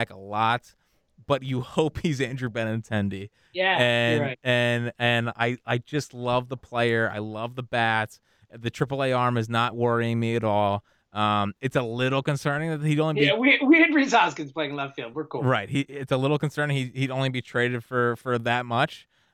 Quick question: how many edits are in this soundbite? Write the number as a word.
zero